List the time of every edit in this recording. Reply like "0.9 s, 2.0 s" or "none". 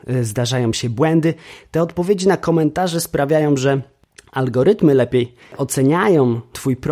none